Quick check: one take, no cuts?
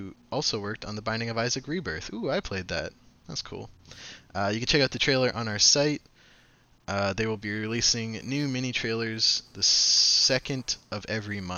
yes; 0 cuts

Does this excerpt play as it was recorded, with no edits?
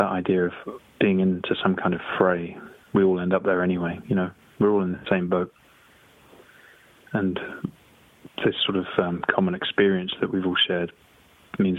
yes; 0 cuts

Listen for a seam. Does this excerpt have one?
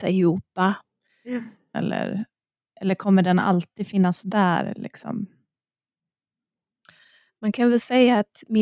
yes; 1 cut; at 1.7 s

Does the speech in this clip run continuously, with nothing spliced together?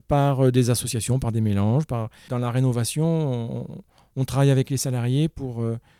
no; 1 cut; at 2.3 s

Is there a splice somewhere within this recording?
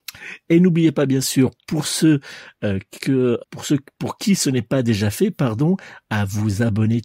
yes; 1 cut; at 3.4 s

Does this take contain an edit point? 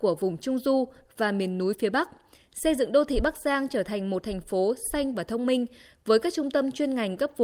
no; 0 cuts

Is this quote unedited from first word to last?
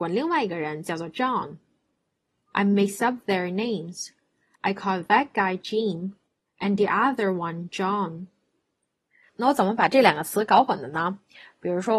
yes; 0 cuts

